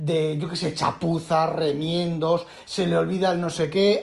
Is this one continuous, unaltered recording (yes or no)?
no